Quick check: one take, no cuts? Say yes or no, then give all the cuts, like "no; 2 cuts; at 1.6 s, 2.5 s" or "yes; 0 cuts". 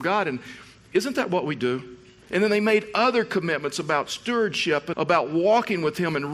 no; 2 cuts; at 2.3 s, 4.9 s